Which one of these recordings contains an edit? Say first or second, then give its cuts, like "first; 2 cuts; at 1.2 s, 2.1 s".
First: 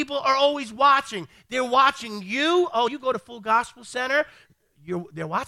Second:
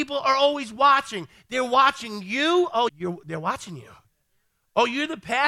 second; 1 cut; at 2.9 s